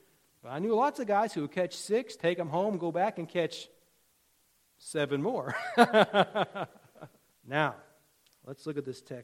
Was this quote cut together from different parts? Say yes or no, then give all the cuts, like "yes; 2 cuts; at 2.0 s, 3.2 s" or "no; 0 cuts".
yes; 1 cut; at 7.3 s